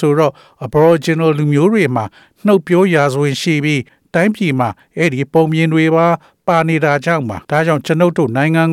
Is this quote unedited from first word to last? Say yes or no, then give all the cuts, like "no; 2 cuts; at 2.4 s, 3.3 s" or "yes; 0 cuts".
no; 1 cut; at 7.4 s